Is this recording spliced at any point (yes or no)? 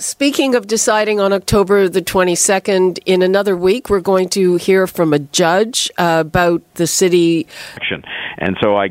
yes